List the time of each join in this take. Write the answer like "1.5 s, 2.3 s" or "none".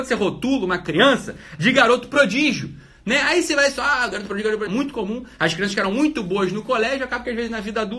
4.7 s